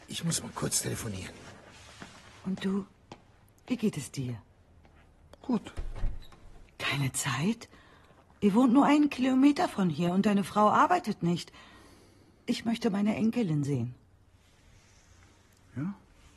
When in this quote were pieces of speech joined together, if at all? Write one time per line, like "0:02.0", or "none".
0:06.7